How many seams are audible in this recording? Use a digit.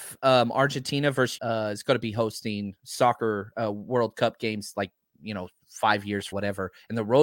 2